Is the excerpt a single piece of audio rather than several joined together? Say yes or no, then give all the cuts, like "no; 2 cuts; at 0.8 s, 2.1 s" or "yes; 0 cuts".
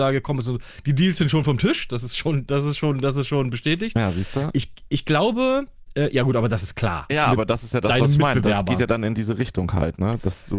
no; 1 cut; at 7.1 s